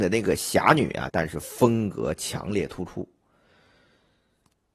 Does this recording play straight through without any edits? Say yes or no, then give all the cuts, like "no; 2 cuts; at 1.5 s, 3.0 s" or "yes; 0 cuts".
no; 1 cut; at 1.1 s